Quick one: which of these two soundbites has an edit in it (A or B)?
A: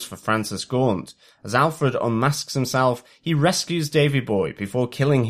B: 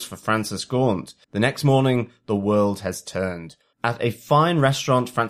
B